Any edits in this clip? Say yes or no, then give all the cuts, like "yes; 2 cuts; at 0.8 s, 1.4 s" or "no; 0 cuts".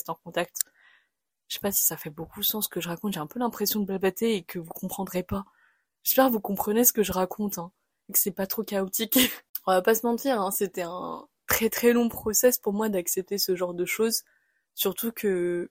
no; 0 cuts